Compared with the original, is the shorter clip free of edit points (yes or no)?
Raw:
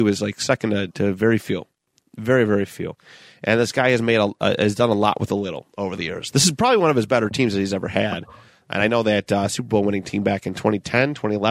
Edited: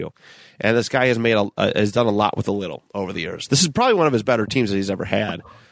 yes